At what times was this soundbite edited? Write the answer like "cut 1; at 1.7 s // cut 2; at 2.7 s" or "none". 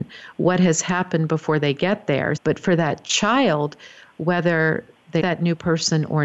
cut 1; at 2.4 s // cut 2; at 5.2 s